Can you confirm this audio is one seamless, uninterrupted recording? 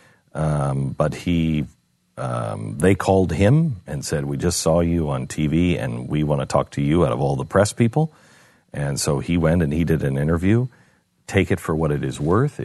yes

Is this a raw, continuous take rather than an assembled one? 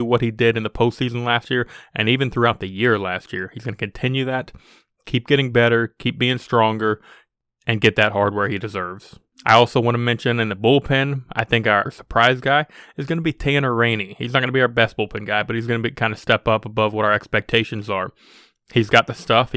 no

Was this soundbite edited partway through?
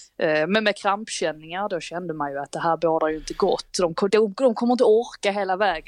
yes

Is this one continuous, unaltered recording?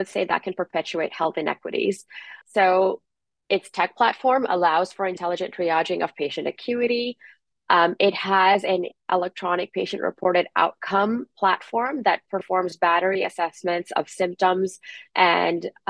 no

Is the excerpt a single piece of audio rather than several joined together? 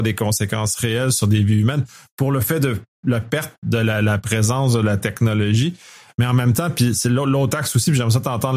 yes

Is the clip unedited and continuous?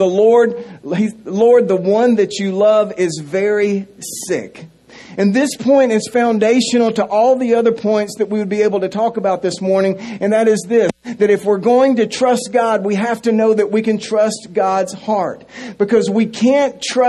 yes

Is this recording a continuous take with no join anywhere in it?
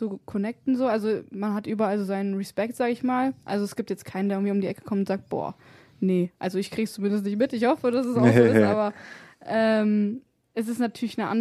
yes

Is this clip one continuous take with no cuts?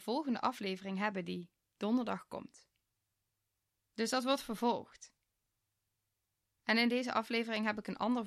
yes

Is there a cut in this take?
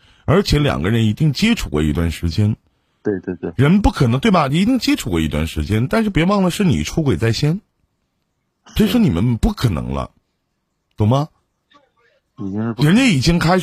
no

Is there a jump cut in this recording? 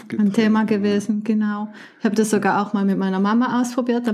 no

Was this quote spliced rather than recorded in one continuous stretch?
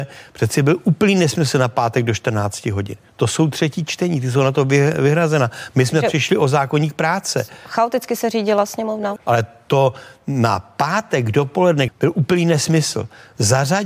yes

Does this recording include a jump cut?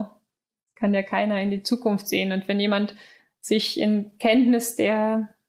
no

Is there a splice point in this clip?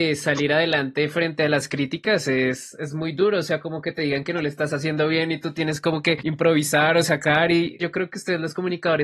no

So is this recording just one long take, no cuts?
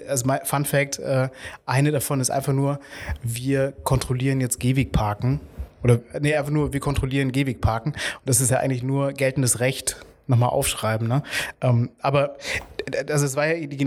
yes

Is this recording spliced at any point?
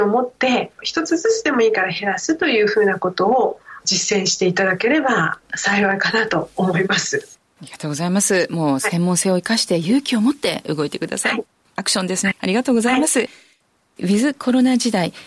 yes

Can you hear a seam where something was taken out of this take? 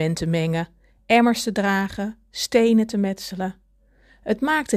no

